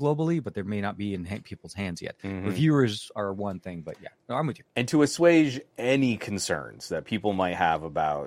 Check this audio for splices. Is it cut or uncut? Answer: uncut